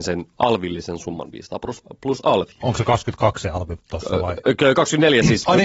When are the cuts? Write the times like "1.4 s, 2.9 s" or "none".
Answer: none